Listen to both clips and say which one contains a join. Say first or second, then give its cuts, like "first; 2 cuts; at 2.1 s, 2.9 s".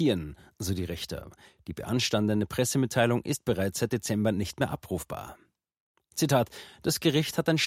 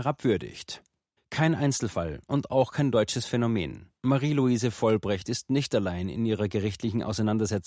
second; 2 cuts; at 1.2 s, 4.0 s